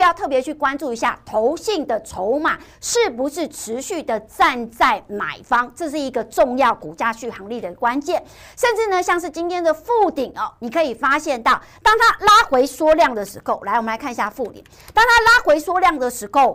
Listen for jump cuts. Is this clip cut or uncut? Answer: uncut